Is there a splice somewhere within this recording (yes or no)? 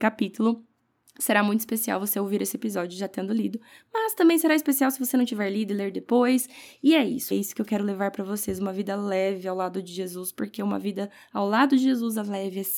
yes